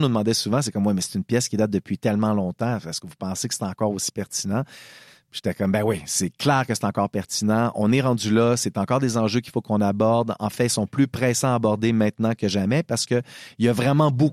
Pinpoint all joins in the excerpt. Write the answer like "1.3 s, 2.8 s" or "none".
none

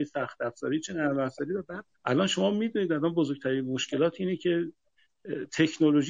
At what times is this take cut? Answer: 1.9 s

